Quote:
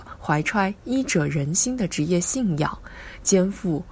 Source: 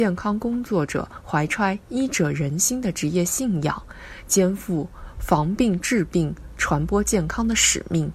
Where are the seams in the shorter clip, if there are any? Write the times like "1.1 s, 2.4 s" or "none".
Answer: none